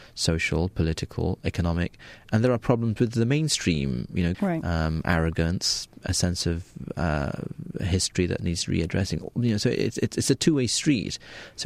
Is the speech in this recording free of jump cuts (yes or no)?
no